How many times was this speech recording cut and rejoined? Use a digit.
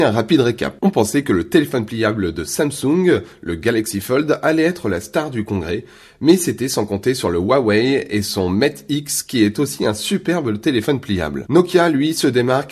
0